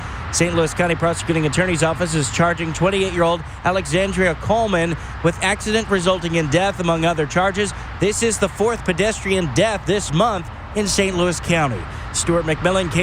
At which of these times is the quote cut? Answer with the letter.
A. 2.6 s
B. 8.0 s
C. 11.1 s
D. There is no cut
B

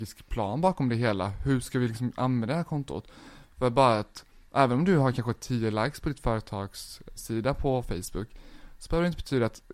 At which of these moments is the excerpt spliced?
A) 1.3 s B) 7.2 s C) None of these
B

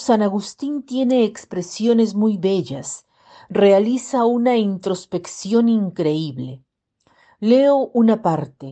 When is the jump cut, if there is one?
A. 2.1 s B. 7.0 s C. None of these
C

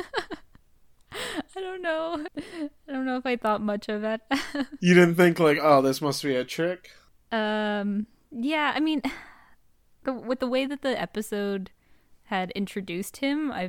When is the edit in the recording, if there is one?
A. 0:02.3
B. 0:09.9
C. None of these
A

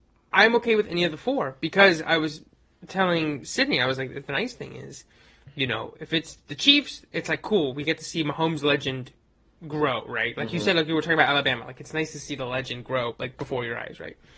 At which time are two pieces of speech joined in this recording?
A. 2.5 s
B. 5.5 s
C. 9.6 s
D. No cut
D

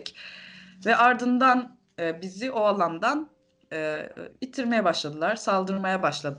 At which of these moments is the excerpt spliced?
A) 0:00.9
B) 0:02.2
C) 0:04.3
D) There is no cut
C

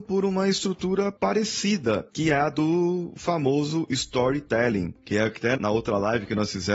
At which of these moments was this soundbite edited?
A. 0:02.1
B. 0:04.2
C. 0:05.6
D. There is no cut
C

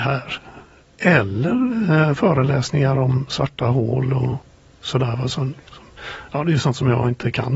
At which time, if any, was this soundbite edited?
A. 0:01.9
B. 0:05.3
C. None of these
C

